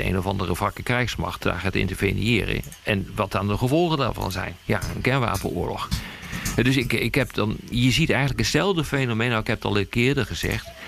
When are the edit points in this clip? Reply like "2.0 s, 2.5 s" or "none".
7.7 s

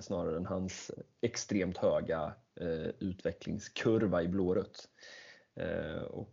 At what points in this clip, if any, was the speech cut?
5.4 s

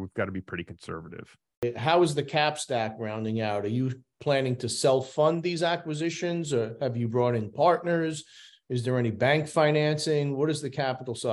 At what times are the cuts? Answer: none

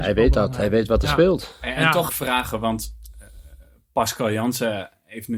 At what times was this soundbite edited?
2.1 s

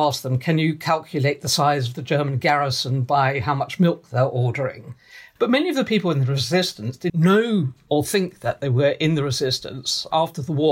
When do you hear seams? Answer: 5.4 s, 7.1 s

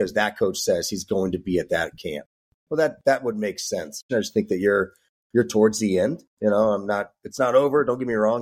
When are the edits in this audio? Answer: 4.1 s

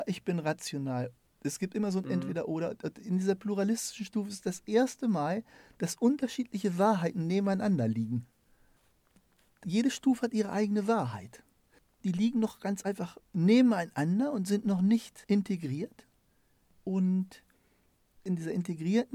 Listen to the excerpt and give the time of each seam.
none

